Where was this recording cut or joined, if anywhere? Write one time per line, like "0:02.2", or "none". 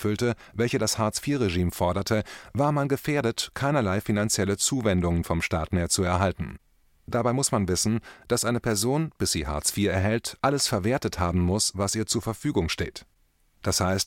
none